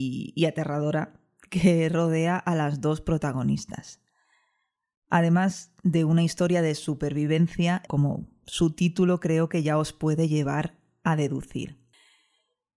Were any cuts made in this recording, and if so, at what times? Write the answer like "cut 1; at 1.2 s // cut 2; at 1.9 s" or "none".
cut 1; at 7.9 s